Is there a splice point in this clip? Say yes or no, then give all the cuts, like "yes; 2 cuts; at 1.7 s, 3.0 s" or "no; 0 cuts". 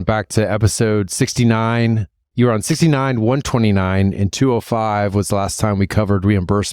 no; 0 cuts